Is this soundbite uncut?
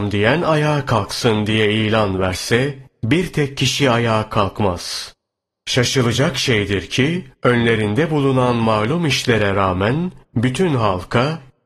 yes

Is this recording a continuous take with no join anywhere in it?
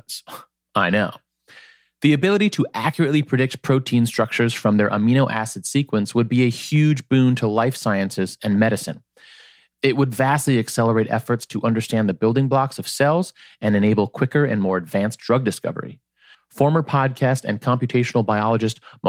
no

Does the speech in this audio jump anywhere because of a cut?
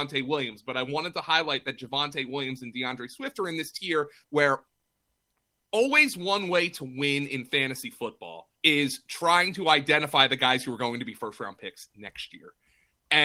yes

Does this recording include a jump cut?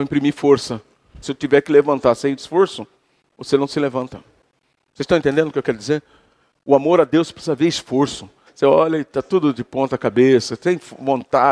yes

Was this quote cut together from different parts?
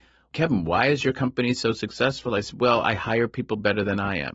no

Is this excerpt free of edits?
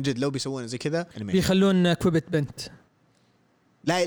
no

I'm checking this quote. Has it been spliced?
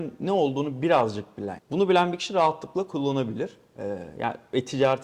yes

